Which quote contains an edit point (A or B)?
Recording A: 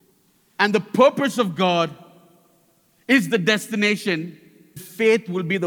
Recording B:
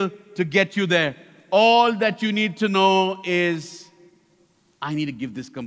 A